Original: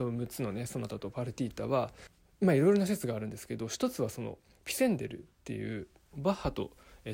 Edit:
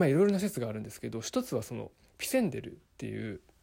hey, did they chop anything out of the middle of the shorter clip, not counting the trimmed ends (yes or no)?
no